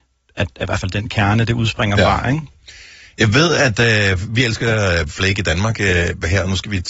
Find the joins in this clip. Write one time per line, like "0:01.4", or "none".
none